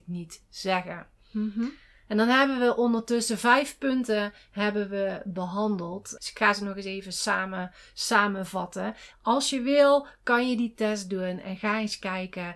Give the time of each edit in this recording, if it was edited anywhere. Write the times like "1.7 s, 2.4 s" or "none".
6.2 s, 9.1 s